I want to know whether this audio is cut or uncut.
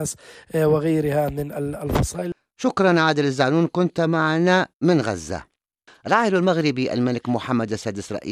cut